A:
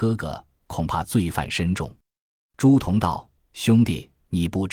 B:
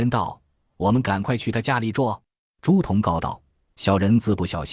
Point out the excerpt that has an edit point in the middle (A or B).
B